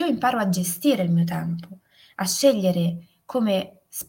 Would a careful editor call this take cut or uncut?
uncut